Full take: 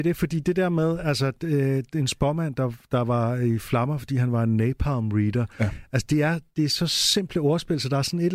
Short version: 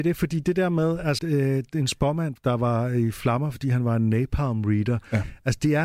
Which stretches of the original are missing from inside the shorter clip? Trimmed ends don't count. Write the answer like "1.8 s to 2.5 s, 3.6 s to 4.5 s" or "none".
1.2 s to 1.4 s, 2.6 s to 2.8 s